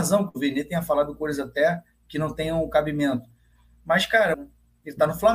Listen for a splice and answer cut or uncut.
cut